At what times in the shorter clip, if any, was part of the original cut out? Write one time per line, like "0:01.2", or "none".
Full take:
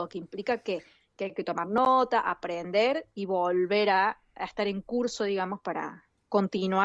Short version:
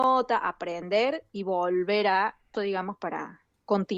0:02.5